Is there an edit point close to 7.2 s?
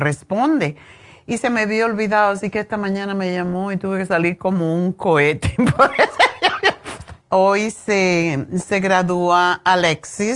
yes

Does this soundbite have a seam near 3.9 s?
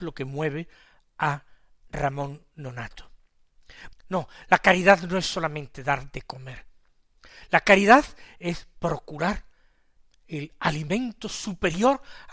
yes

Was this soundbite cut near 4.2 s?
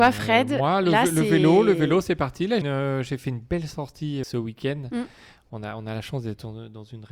yes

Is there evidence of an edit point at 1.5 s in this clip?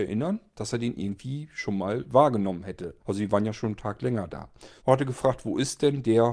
no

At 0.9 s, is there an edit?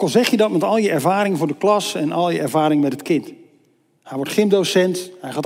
no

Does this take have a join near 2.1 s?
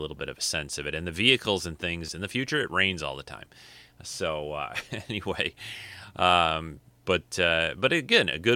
yes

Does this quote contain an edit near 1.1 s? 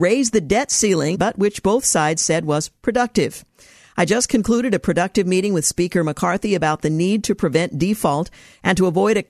yes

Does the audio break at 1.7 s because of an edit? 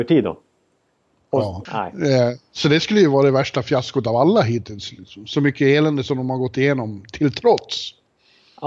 yes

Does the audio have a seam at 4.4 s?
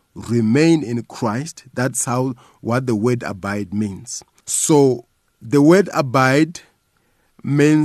yes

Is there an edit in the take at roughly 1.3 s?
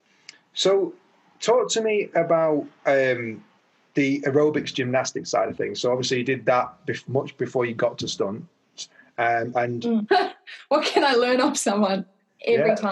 no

